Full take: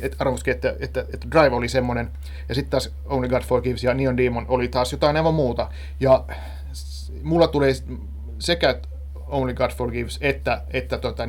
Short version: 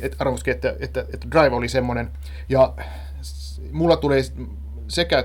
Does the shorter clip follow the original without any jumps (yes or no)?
no